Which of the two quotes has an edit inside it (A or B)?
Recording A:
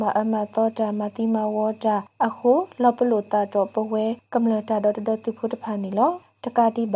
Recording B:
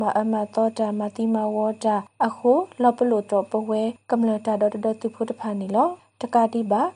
B